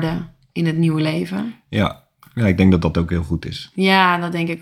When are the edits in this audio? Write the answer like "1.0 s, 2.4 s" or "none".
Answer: none